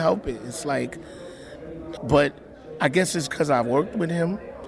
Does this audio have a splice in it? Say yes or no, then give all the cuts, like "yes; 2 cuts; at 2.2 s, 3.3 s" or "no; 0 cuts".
yes; 1 cut; at 2.0 s